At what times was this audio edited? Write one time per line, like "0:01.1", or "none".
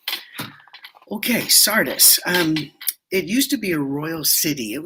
none